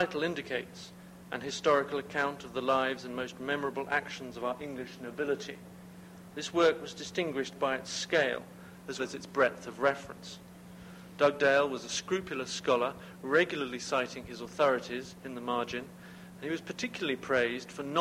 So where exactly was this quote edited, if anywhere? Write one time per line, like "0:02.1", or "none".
0:09.0

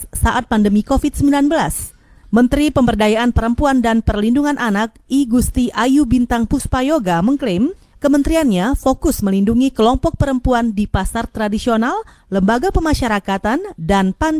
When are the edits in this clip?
none

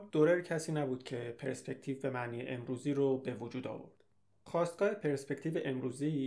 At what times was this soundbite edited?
none

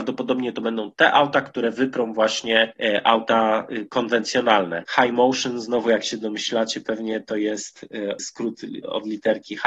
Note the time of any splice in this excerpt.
0:04.8
0:08.2

